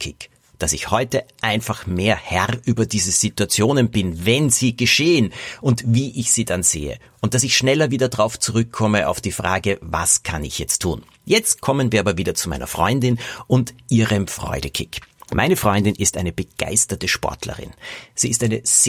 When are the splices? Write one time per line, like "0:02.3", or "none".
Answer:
none